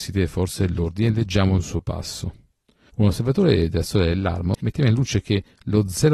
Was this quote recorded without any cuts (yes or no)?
no